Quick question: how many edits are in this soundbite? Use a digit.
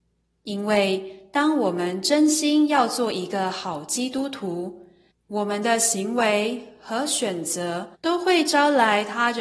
2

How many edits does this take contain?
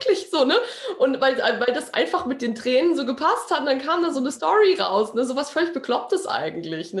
0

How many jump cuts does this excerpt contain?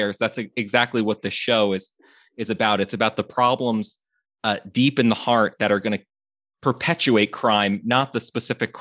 0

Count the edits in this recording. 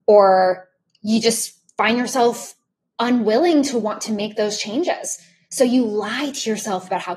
0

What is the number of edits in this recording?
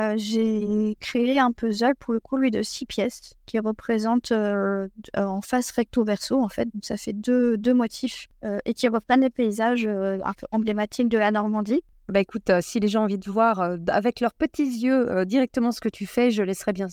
0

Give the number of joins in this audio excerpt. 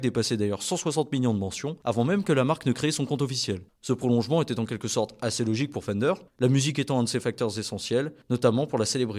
0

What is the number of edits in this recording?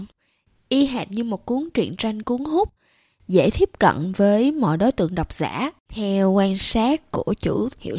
0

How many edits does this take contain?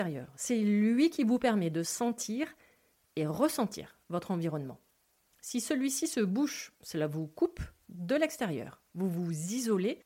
0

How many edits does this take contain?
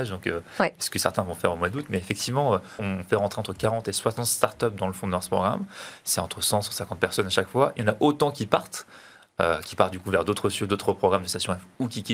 1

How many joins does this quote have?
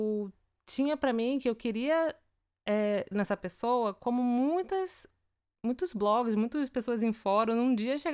1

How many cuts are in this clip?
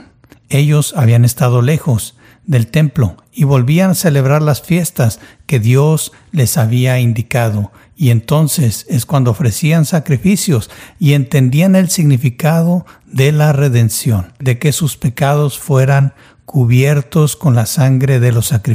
1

